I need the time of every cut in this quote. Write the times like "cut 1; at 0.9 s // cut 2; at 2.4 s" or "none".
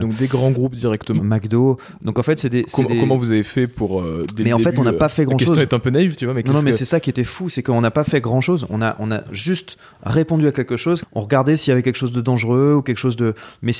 cut 1; at 1.2 s // cut 2; at 11.0 s